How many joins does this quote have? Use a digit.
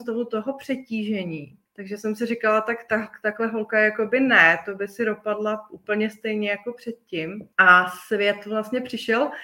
2